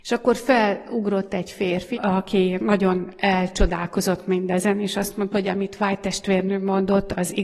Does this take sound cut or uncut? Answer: cut